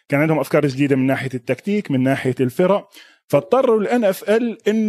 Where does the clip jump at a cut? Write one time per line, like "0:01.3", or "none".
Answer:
none